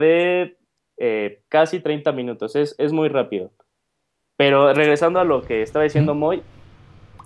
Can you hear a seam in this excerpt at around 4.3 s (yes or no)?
no